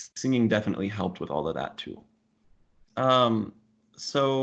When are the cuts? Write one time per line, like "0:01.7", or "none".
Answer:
0:02.9